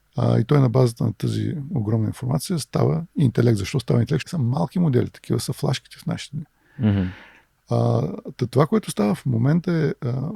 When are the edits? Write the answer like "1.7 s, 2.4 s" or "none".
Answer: 4.2 s, 9.2 s

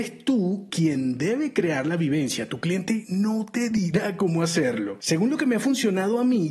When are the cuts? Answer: none

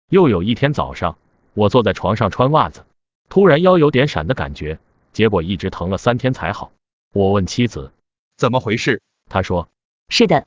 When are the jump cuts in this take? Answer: 9.1 s

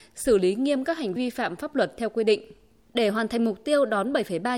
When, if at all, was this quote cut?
1.2 s, 2.9 s

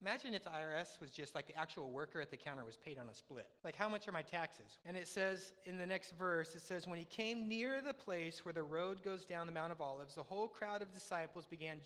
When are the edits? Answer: 3.6 s, 4.8 s

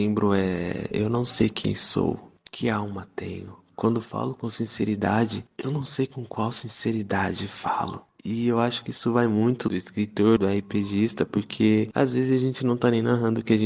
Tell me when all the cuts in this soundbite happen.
none

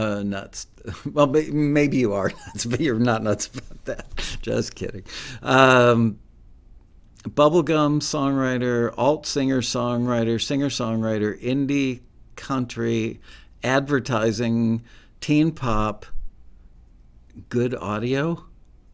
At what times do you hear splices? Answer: none

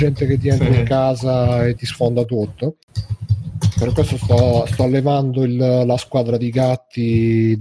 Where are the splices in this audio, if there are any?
1.8 s

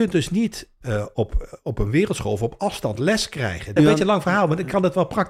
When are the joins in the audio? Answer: 3.8 s

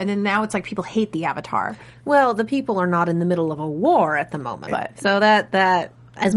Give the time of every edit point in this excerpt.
4.7 s

